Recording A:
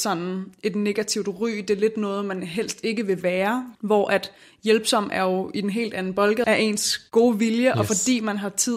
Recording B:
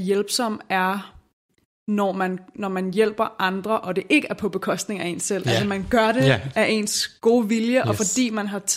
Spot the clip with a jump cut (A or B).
A